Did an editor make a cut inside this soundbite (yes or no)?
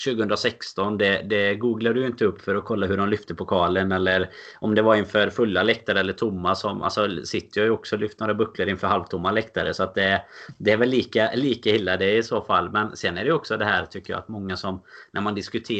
no